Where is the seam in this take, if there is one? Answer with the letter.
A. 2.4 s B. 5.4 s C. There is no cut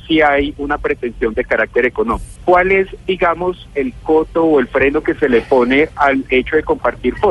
A